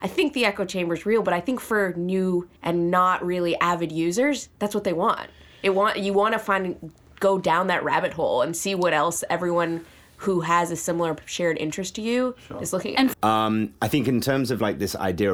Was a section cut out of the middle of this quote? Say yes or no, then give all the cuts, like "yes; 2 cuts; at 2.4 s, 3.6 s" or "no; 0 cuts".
yes; 2 cuts; at 2.6 s, 13.1 s